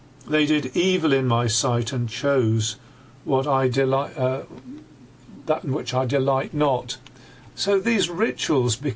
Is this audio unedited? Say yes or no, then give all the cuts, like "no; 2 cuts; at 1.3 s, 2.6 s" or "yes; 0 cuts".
no; 1 cut; at 7.5 s